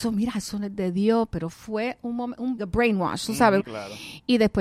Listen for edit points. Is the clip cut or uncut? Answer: cut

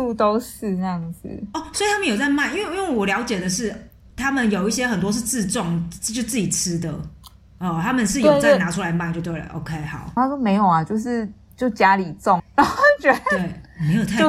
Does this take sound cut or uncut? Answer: cut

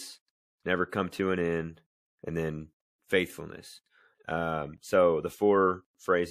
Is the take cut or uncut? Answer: cut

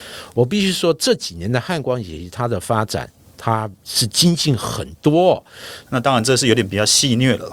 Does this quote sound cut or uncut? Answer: cut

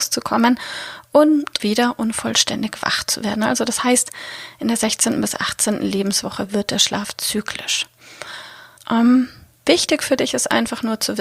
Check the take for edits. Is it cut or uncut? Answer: cut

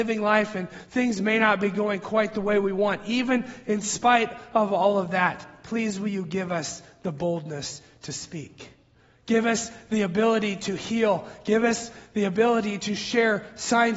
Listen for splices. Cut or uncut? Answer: uncut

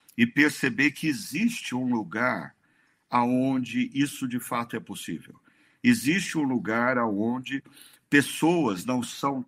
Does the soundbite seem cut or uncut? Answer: uncut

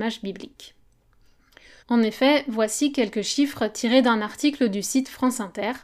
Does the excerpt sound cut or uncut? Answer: cut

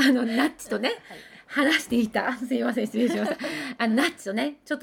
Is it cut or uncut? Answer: uncut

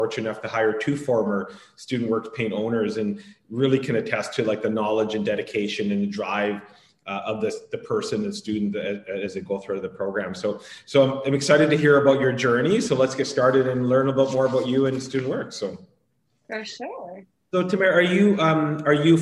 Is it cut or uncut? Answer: uncut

